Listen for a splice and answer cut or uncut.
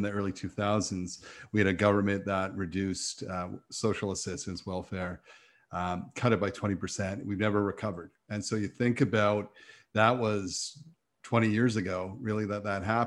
uncut